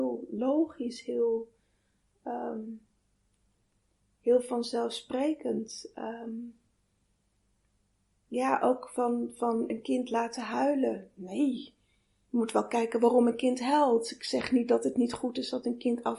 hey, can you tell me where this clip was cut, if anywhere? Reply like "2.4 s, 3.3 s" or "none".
none